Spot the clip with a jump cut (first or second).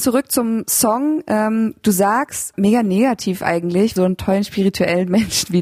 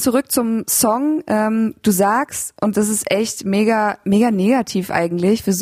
first